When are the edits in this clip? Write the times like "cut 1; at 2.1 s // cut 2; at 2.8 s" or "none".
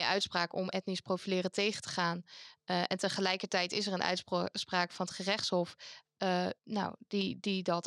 cut 1; at 6.6 s